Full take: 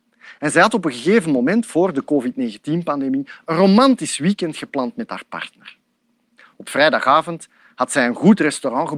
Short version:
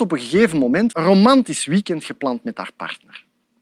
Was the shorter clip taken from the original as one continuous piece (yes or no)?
no